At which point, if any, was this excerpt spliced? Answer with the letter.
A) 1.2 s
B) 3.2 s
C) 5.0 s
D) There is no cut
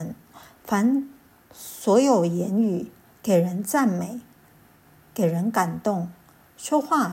B